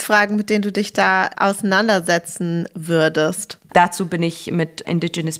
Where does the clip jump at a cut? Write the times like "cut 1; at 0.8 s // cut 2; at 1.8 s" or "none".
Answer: cut 1; at 3.7 s